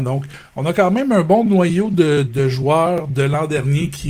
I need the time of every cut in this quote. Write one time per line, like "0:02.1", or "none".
0:02.2